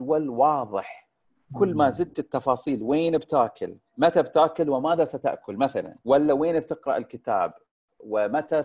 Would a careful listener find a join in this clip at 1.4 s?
no; 2 cuts; at 3.9 s, 6.0 s

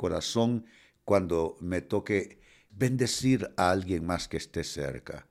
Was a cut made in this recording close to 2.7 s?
yes; 1 cut; at 2.7 s

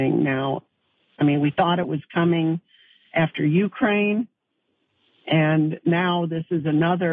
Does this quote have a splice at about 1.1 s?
yes; 1 cut; at 1.1 s

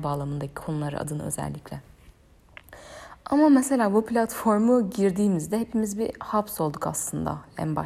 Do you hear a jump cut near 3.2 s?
no; 0 cuts

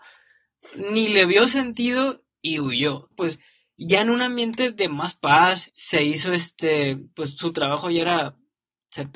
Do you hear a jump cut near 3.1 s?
yes; 2 cuts; at 3.1 s, 5.7 s

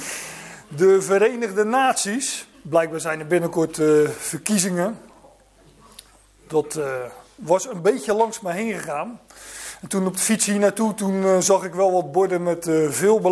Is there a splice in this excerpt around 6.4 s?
no; 1 cut; at 2.5 s

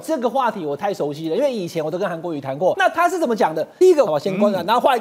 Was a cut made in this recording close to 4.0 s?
yes; 1 cut; at 4.0 s

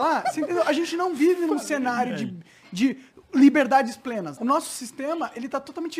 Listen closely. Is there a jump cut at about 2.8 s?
no; 1 cut; at 4.4 s

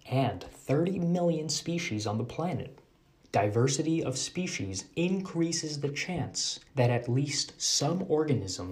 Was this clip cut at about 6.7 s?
yes; 2 cuts; at 3.2 s, 6.7 s

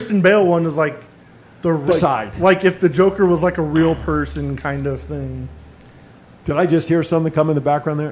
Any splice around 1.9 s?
yes; 1 cut; at 1.9 s

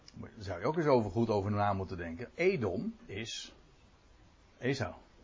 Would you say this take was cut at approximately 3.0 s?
yes; 1 cut; at 3.0 s

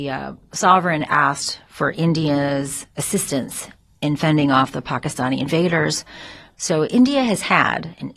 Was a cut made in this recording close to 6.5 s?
yes; 1 cut; at 6.5 s

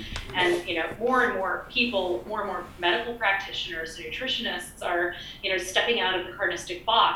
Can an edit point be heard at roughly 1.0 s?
no; 0 cuts

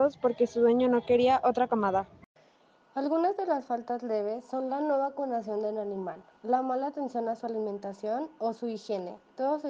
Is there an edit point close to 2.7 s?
no; 0 cuts

